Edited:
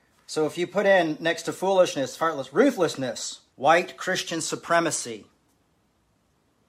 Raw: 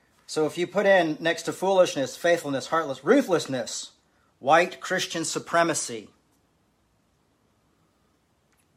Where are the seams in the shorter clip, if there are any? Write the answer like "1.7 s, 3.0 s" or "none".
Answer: 2.2 s, 3.5 s